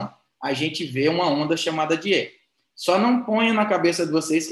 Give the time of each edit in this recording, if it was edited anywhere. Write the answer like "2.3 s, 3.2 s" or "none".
none

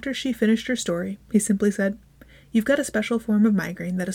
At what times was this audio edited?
none

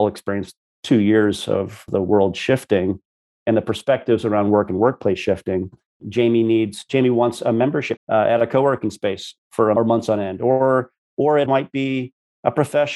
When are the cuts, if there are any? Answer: 5.9 s, 8.0 s, 11.5 s

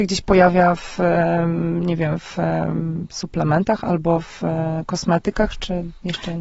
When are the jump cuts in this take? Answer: none

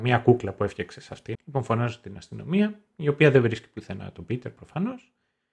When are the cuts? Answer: 1.3 s

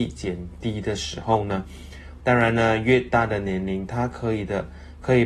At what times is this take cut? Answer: 2.2 s

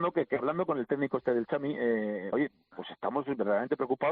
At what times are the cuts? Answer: 2.3 s

